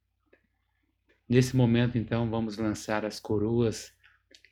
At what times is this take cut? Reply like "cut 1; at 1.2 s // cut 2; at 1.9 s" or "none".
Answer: cut 1; at 1.1 s